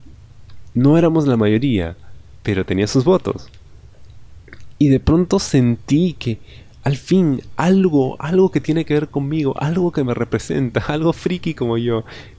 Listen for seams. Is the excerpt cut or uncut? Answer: uncut